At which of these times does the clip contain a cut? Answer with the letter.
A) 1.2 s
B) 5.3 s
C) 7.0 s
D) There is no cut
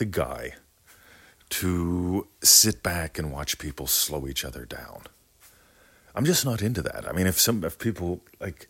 D